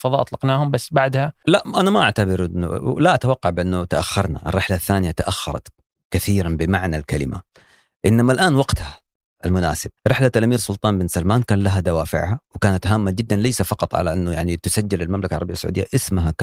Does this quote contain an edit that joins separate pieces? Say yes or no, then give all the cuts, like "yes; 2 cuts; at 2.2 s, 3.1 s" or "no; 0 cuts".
yes; 1 cut; at 10.0 s